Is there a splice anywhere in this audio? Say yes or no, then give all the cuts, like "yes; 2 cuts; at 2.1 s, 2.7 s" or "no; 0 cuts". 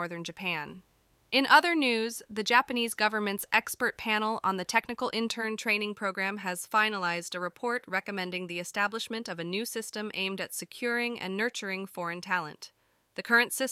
yes; 1 cut; at 1.2 s